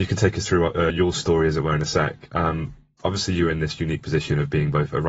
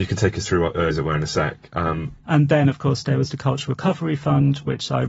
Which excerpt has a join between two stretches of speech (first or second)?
second